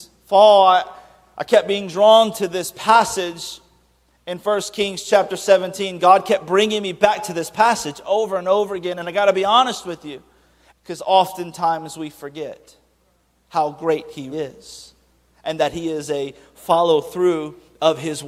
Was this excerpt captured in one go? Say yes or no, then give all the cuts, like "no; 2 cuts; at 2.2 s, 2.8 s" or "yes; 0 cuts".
no; 2 cuts; at 10.7 s, 14.3 s